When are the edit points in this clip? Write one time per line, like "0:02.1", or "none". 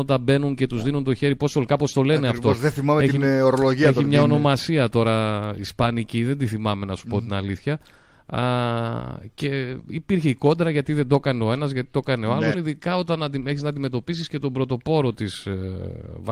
0:12.5